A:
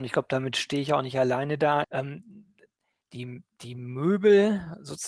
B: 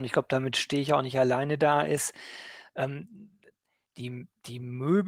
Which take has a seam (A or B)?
A